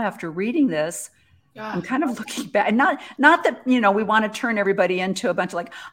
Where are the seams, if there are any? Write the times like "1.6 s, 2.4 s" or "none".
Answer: none